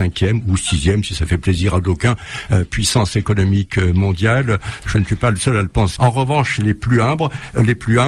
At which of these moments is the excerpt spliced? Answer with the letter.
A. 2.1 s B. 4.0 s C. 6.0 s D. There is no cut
C